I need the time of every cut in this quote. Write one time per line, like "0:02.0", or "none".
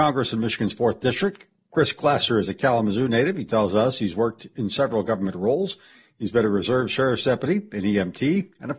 none